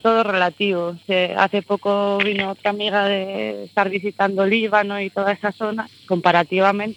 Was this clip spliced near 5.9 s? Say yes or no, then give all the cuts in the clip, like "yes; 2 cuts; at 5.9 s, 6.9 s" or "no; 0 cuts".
yes; 1 cut; at 5.9 s